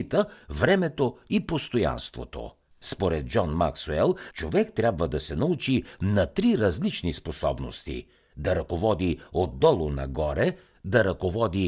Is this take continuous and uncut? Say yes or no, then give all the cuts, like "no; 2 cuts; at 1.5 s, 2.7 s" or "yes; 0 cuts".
no; 2 cuts; at 2.7 s, 4.3 s